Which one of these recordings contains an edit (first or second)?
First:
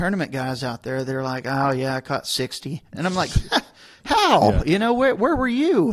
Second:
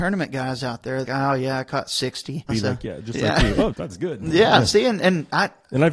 second